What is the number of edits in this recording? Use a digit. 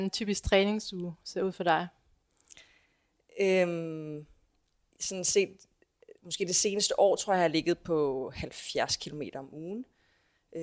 1